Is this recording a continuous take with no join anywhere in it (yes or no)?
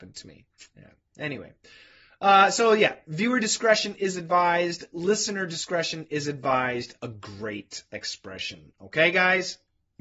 yes